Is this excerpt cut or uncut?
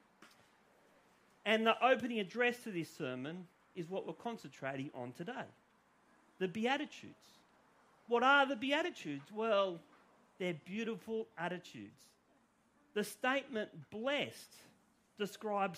uncut